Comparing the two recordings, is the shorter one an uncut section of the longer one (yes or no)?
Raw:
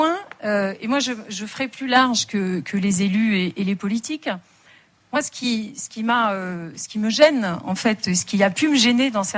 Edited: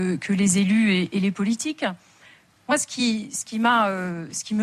yes